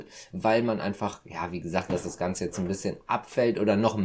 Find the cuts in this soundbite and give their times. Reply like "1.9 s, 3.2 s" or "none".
1.9 s